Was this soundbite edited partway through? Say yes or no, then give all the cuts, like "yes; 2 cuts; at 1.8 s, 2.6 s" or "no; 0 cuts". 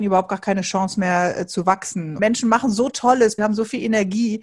yes; 2 cuts; at 2.2 s, 3.4 s